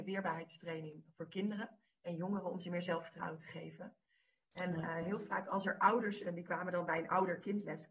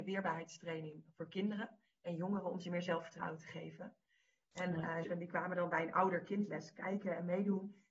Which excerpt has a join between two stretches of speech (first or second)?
second